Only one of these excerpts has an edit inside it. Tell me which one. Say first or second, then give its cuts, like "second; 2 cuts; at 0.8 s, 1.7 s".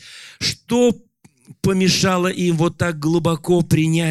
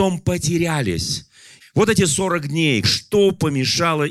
second; 2 cuts; at 1.6 s, 2.8 s